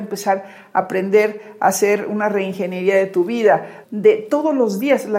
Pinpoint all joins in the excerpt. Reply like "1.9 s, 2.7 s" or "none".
3.8 s